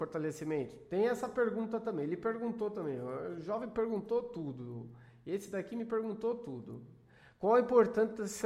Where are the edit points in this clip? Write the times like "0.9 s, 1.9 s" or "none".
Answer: none